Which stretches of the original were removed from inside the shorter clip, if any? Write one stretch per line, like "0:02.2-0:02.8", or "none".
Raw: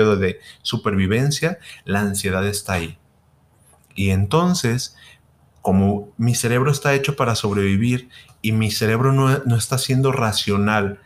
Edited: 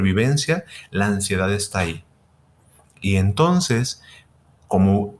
none